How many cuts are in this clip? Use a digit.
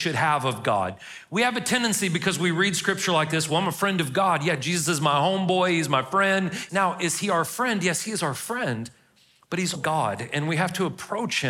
2